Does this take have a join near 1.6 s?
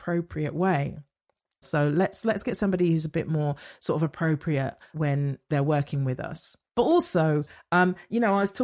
yes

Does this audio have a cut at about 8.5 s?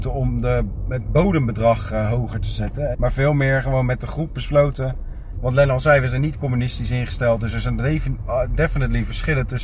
no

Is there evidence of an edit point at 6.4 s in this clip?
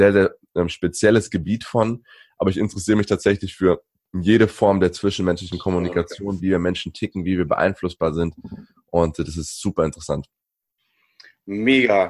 yes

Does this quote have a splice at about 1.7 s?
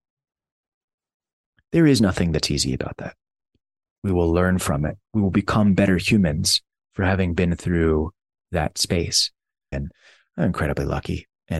no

